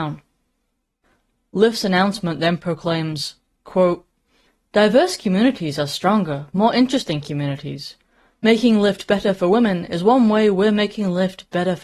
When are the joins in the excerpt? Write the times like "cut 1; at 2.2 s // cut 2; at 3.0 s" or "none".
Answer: none